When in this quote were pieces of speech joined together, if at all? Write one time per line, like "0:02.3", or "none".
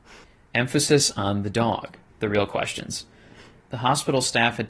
0:02.1